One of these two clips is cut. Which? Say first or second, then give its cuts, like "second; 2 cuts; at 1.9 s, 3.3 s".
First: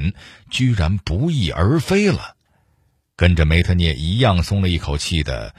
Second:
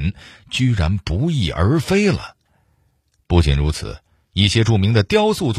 first; 1 cut; at 3.1 s